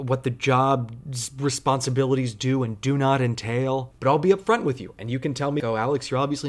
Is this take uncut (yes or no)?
no